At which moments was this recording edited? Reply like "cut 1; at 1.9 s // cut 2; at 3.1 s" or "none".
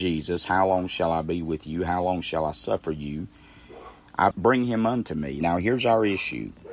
cut 1; at 4.3 s // cut 2; at 5.4 s